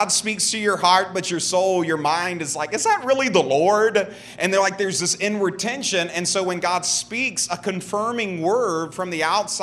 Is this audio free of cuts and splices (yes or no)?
yes